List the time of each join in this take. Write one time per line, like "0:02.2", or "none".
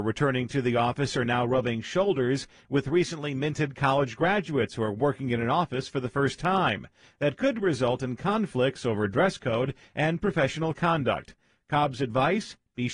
none